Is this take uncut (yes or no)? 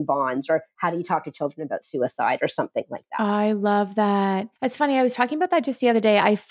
no